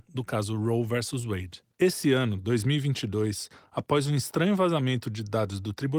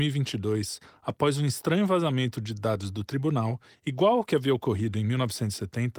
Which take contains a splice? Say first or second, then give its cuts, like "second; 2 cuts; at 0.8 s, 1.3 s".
first; 1 cut; at 1.7 s